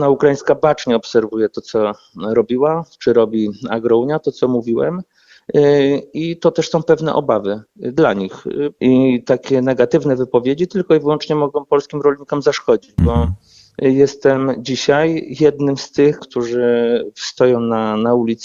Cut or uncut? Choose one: cut